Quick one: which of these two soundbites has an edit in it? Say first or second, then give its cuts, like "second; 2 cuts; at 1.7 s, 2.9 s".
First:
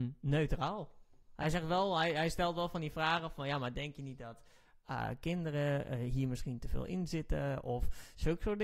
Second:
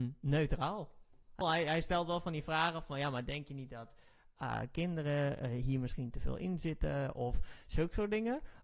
second; 1 cut; at 1.4 s